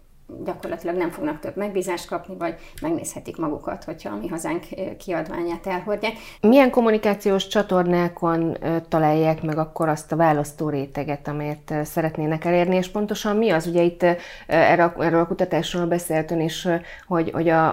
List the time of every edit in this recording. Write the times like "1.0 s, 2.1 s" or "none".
6.4 s